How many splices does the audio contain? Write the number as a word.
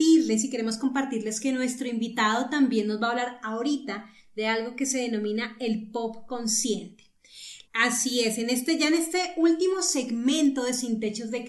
one